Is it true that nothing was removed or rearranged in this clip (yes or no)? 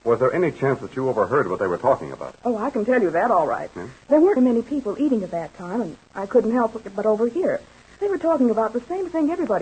no